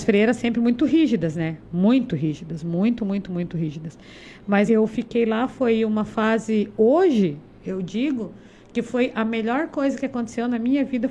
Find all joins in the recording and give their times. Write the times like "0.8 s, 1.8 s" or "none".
4.7 s